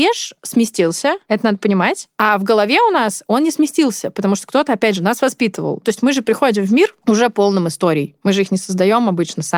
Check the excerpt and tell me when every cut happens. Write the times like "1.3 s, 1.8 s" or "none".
none